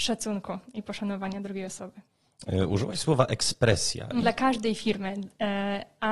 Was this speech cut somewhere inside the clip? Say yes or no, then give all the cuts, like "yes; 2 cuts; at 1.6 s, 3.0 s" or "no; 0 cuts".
yes; 1 cut; at 4.2 s